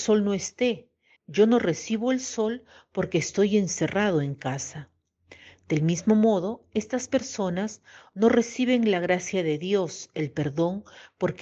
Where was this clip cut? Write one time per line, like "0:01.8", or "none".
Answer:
0:01.2

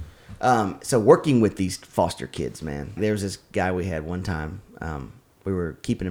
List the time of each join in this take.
0:03.0

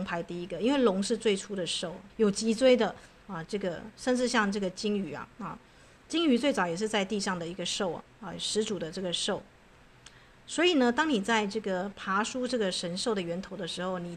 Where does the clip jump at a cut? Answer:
0:02.1

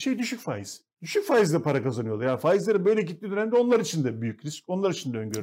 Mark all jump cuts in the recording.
0:00.9

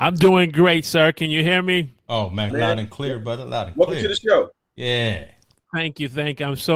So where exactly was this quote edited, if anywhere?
0:02.5

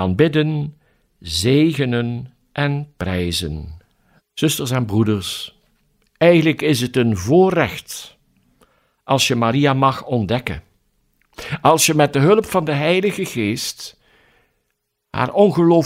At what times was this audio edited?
0:04.2

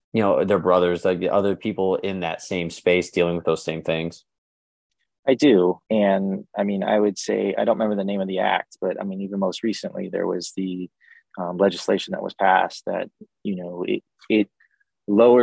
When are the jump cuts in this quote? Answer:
0:05.9

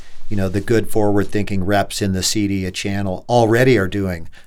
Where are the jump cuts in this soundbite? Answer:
none

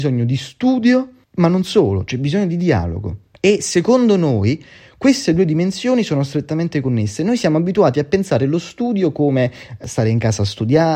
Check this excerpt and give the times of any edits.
none

